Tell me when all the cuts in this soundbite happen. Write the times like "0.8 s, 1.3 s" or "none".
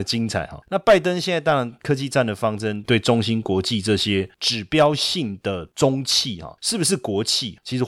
2.8 s